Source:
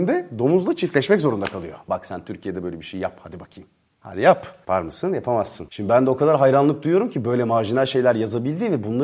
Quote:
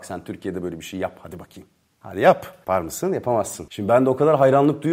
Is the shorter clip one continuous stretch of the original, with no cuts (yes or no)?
yes